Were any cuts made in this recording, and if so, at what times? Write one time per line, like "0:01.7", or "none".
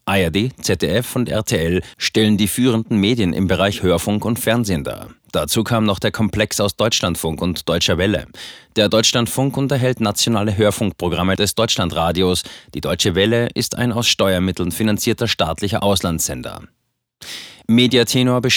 none